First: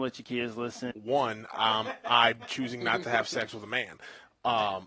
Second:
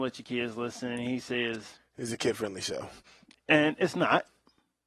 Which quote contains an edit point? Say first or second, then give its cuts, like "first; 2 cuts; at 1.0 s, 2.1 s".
first; 1 cut; at 0.9 s